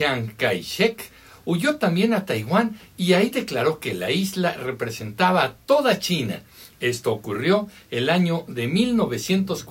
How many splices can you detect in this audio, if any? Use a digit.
1